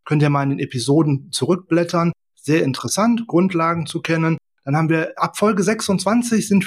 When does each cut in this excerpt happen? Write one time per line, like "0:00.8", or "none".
none